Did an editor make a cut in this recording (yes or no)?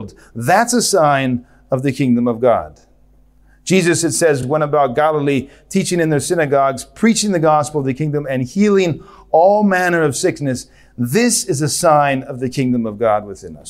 no